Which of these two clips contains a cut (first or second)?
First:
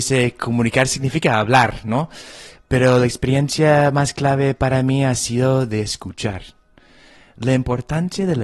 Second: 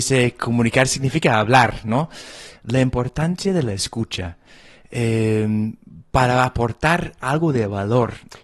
second